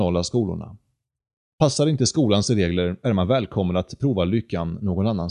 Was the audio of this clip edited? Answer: yes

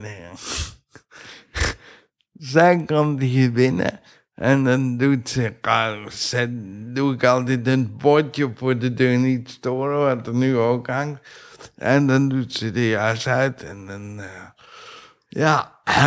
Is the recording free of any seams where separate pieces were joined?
yes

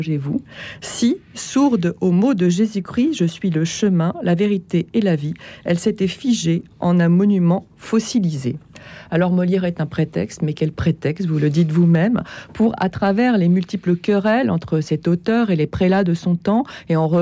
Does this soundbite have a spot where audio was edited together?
no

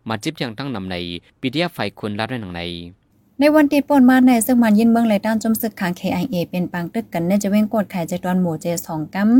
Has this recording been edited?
no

